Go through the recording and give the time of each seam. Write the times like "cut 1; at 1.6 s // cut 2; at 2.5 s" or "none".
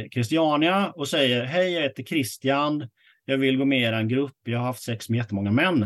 none